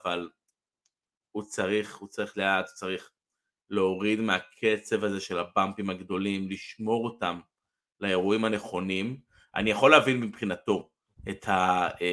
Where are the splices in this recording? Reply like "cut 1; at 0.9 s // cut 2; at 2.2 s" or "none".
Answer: cut 1; at 2.3 s